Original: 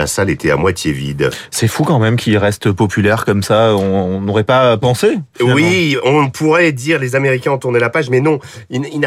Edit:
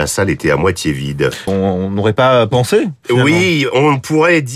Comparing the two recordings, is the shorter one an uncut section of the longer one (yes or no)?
no